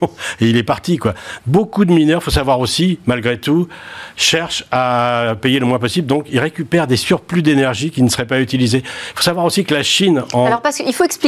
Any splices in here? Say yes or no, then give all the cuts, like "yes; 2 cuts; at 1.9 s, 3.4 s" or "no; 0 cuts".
yes; 1 cut; at 1.4 s